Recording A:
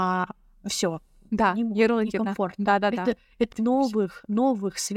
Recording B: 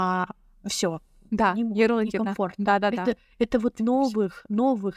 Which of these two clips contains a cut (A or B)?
A